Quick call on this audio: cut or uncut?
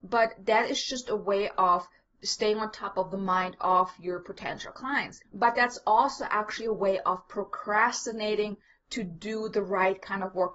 cut